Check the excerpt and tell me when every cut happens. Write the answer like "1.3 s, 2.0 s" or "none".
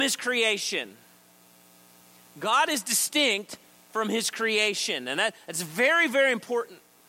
none